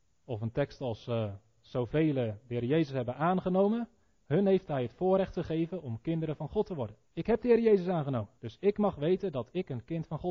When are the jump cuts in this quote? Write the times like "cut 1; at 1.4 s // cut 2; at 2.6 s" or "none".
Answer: cut 1; at 7.0 s // cut 2; at 8.4 s